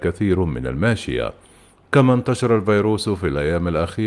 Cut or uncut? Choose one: uncut